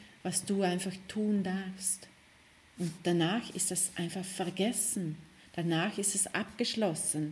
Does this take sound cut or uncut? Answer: uncut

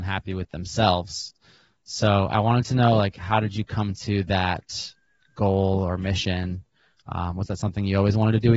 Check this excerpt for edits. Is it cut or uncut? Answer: uncut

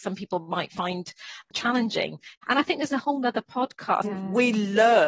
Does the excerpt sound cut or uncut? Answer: cut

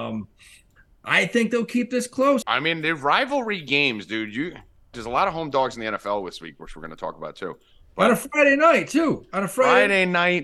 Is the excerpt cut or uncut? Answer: cut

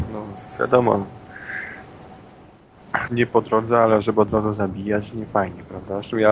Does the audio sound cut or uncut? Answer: cut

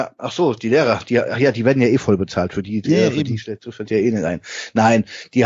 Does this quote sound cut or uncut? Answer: uncut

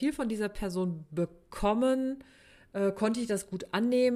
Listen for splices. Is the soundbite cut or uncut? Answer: uncut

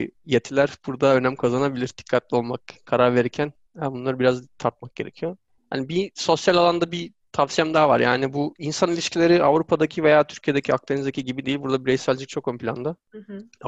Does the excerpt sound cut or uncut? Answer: uncut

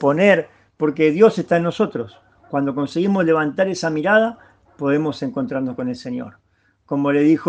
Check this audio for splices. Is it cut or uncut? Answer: uncut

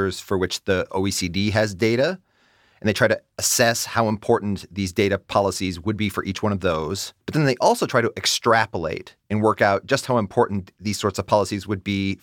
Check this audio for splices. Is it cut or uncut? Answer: cut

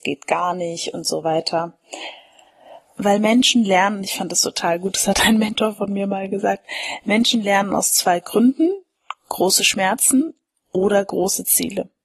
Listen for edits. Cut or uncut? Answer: cut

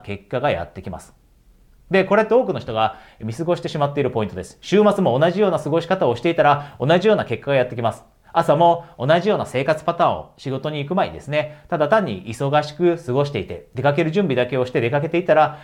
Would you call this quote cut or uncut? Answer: uncut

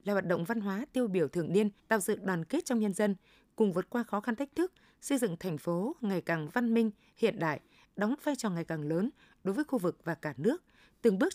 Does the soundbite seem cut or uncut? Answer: cut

